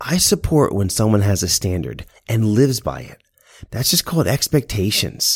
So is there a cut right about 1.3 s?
no; 1 cut; at 3.6 s

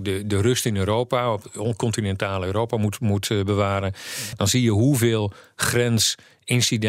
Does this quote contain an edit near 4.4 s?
no; 0 cuts

